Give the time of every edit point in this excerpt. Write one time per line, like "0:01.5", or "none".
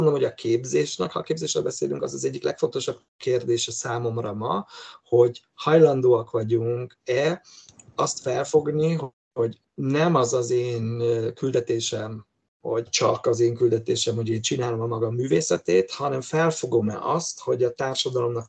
none

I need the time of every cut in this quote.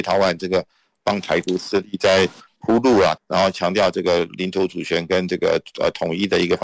0:03.2

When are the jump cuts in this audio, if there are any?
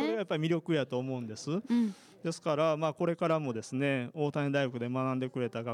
none

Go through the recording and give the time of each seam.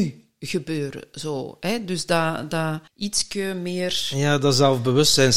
0:02.9

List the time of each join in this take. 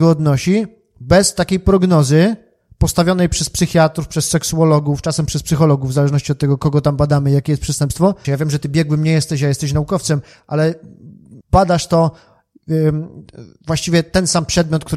0:08.2
0:11.4

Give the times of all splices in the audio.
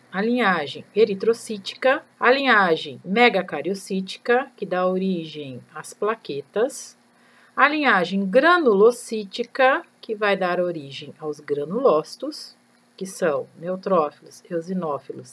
0:02.1

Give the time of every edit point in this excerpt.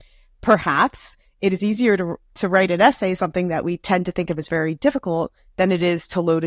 none

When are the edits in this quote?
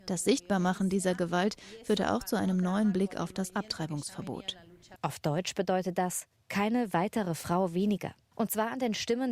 0:05.0
0:08.3

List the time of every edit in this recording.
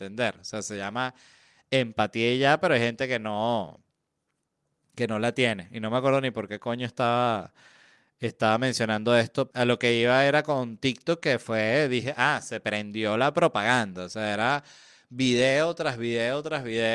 0:09.5

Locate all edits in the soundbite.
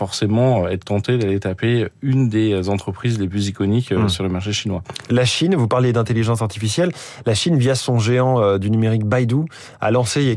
none

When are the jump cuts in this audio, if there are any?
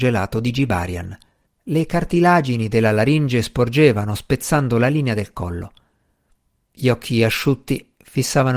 0:01.5

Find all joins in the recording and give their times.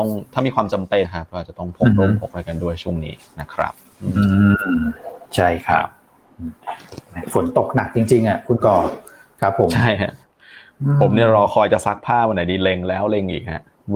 0:01.0

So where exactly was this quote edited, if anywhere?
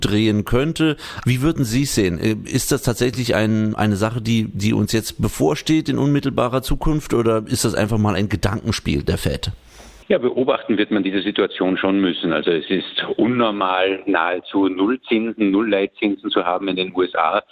none

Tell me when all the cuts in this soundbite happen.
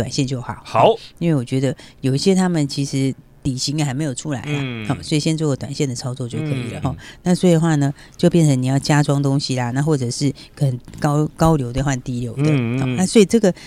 0:06.8

